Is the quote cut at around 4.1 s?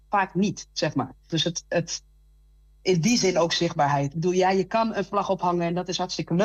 no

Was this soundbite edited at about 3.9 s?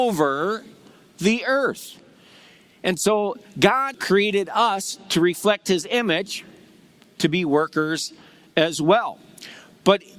yes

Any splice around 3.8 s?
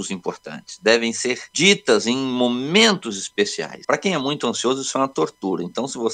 yes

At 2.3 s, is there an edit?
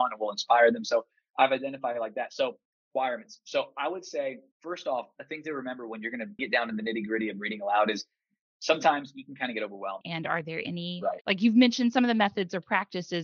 no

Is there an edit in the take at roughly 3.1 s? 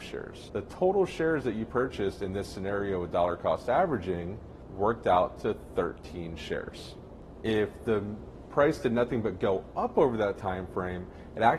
no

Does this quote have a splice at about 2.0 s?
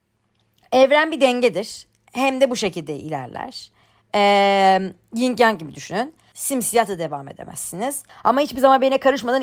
no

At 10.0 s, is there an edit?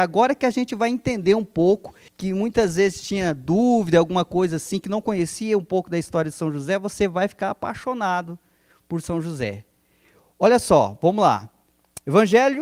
no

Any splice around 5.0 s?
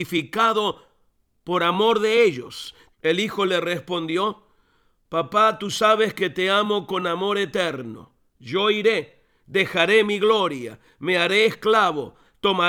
no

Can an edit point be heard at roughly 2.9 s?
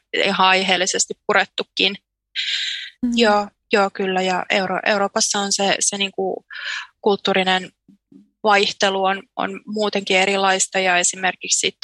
yes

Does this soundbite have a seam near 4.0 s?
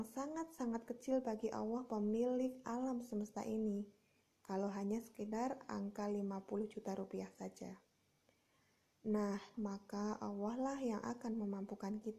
no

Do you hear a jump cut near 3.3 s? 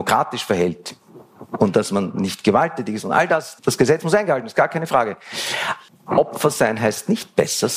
no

